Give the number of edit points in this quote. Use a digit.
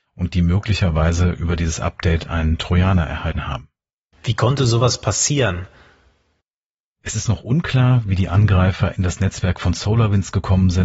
1